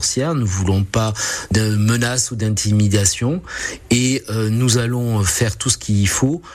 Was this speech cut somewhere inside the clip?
no; 0 cuts

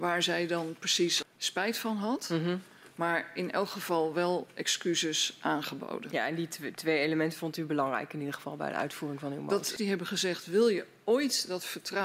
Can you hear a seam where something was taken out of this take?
yes; 2 cuts; at 1.2 s, 9.8 s

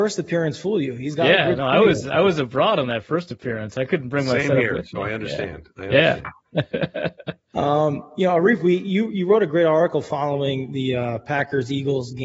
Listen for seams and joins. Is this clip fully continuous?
yes; 0 cuts

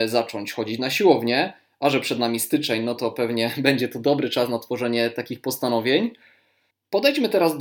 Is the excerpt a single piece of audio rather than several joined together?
no; 1 cut; at 6.7 s

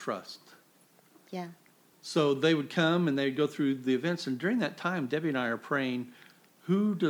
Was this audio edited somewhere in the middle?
yes; 1 cut; at 1.9 s

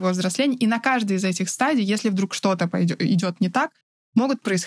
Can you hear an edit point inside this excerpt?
no; 0 cuts

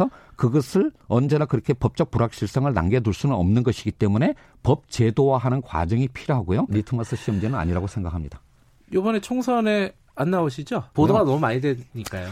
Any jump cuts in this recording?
yes; 2 cuts; at 6.7 s, 10.9 s

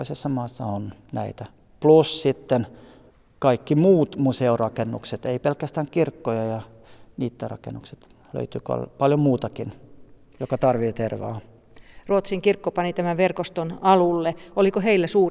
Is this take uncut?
yes; 0 cuts

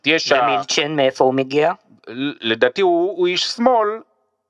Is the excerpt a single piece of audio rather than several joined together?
yes; 0 cuts

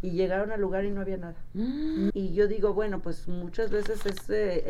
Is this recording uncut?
no; 1 cut; at 2.1 s

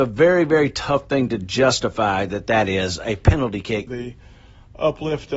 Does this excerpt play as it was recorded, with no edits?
no; 1 cut; at 3.9 s

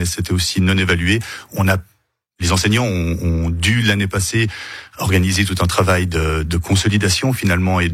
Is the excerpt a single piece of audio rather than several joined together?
yes; 0 cuts

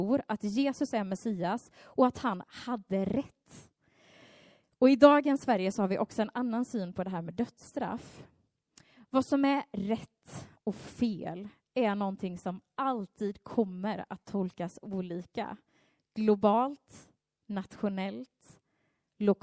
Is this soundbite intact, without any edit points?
yes; 0 cuts

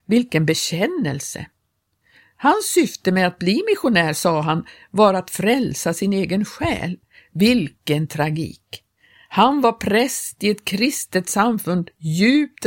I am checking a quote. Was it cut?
no; 0 cuts

